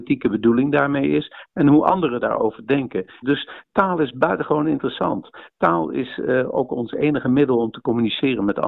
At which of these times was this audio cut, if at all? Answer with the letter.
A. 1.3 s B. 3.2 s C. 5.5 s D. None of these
B